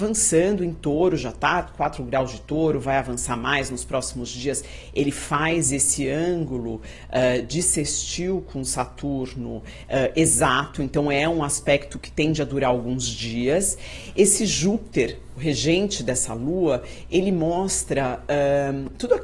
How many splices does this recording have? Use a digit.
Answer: 0